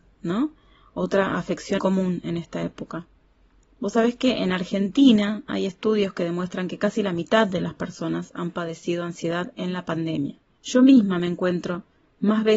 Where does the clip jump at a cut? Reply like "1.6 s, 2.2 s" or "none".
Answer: 1.8 s, 10.6 s